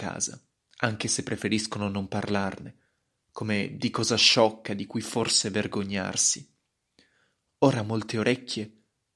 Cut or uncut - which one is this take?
uncut